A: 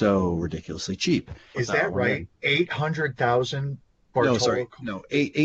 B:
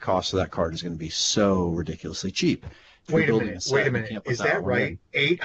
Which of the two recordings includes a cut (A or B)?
A